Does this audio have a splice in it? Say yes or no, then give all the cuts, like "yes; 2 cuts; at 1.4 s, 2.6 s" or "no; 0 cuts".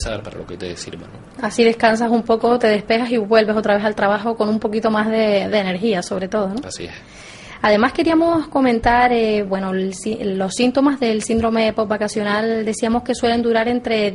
no; 0 cuts